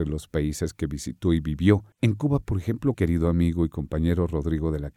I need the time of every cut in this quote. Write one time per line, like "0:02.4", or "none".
0:01.9
0:02.9